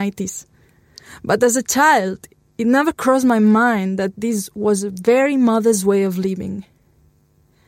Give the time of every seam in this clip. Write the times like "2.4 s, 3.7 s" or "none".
none